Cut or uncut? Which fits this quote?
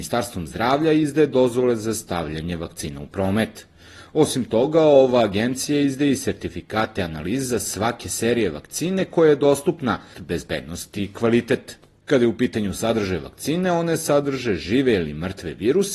cut